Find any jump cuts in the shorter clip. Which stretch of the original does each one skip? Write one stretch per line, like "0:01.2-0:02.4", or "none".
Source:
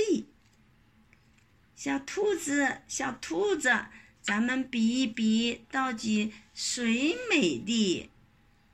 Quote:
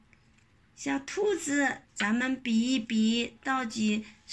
0:02.8-0:04.1